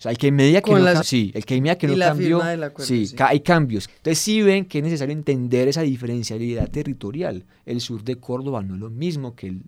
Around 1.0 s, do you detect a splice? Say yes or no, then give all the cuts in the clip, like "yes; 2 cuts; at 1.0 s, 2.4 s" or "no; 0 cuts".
yes; 2 cuts; at 1.0 s, 3.9 s